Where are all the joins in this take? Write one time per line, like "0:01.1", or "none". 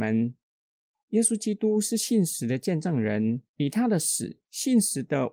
0:03.5